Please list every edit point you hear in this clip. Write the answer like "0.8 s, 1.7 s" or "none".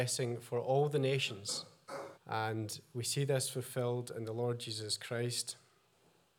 2.1 s